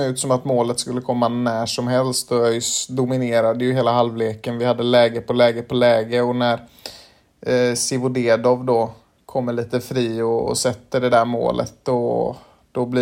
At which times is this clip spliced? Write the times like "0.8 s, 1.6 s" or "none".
none